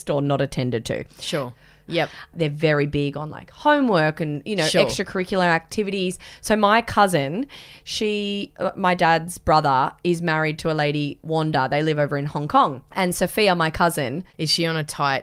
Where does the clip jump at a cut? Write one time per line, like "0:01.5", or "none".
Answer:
0:01.9
0:12.9